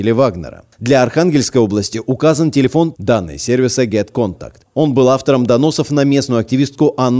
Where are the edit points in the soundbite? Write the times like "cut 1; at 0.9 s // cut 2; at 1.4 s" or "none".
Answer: cut 1; at 2.9 s